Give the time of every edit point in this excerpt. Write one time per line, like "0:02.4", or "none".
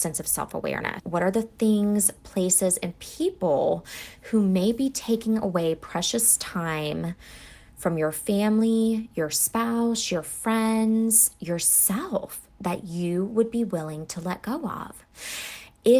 0:01.0